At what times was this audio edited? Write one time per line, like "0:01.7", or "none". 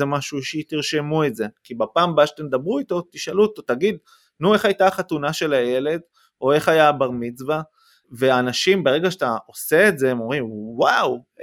none